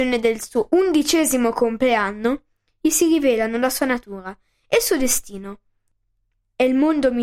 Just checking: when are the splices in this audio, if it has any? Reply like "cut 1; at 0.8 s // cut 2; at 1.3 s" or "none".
none